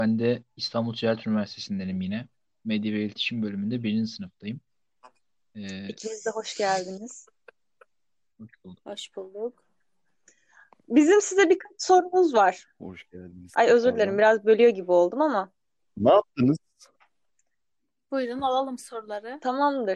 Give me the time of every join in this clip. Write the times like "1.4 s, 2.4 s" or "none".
none